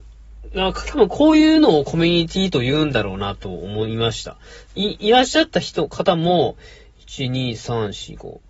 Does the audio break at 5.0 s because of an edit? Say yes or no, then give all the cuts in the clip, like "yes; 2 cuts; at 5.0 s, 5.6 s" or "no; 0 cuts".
no; 0 cuts